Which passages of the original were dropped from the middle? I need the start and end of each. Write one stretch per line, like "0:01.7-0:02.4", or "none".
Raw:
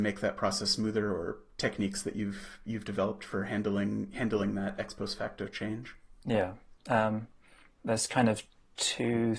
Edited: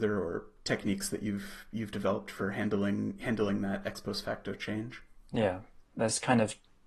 0:06.8-0:07.7